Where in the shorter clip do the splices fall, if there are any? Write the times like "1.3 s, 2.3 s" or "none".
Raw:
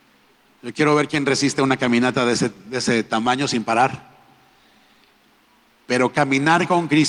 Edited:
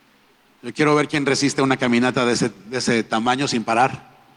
none

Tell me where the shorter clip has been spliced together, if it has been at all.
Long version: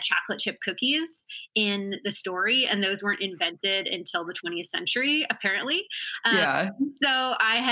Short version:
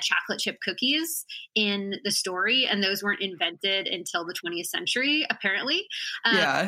none

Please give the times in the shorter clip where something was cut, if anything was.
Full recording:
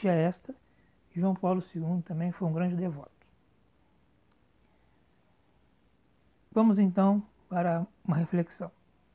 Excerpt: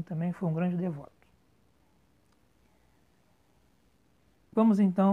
none

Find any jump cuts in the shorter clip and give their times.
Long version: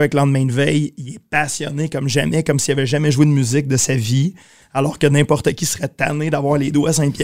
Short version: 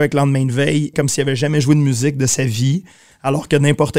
0.9 s

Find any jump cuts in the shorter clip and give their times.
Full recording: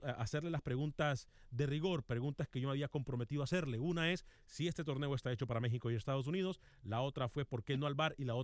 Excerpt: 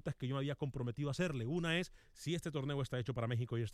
none

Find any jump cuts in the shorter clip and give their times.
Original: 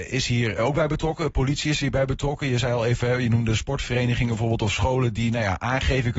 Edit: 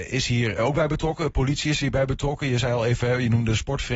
none

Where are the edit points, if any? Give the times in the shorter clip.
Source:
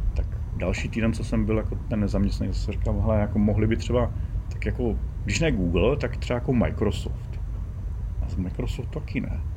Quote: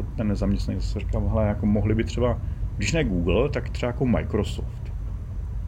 2.7 s

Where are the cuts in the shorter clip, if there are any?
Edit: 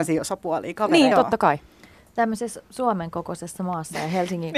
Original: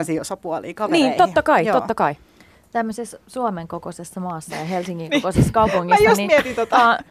1.1 s

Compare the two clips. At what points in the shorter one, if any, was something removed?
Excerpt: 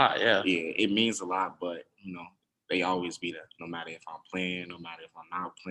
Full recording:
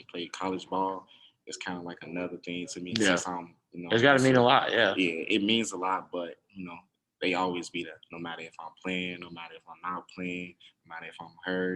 none

